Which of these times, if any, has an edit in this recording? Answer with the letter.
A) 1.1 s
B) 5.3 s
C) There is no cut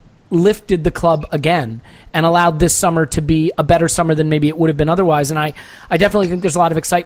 C